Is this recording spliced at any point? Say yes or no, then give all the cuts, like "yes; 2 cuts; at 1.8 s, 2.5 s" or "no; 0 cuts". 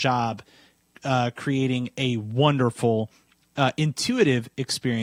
no; 0 cuts